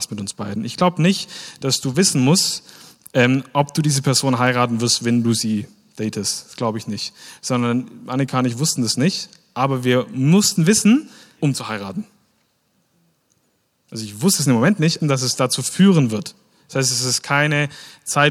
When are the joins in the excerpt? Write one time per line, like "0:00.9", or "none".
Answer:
0:11.4
0:15.0

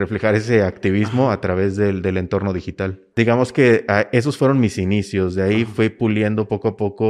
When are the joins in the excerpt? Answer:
0:03.1

